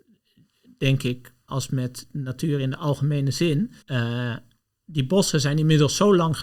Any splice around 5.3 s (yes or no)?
no